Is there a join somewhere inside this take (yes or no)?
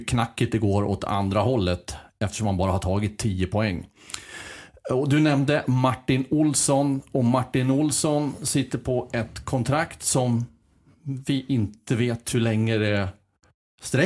no